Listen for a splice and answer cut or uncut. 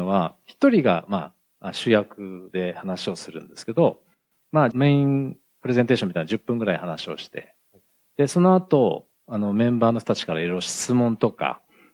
cut